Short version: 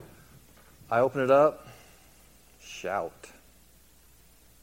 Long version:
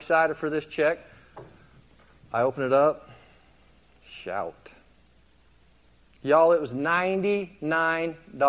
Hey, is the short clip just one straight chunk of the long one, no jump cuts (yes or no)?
yes